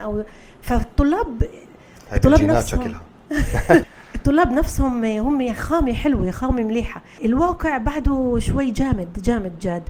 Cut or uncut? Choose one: cut